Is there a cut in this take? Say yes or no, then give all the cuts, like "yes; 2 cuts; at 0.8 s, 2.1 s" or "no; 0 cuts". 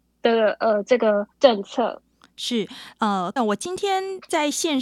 yes; 2 cuts; at 1.3 s, 3.4 s